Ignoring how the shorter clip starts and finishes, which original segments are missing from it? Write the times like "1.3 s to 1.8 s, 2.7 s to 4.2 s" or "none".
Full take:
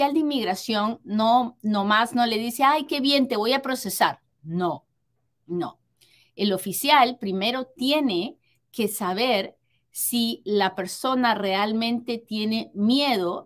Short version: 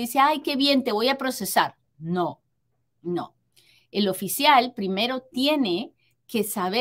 none